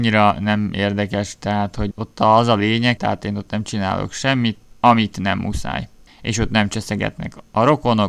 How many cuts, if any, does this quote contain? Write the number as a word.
two